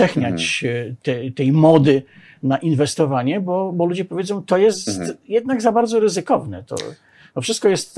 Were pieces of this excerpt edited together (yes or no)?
no